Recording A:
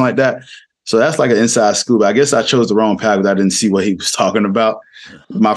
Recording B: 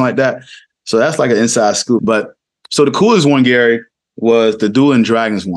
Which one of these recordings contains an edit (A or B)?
B